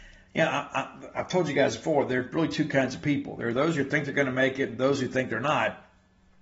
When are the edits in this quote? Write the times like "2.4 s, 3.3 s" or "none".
none